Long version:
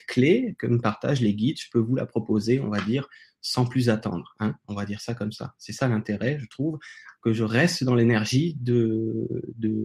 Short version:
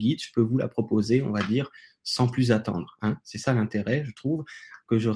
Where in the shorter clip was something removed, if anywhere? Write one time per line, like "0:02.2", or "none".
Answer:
0:03.2